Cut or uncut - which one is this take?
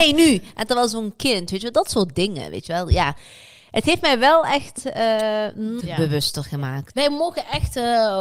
cut